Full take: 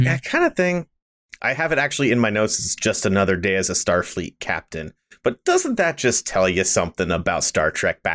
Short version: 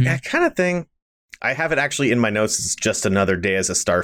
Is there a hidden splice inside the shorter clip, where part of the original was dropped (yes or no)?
no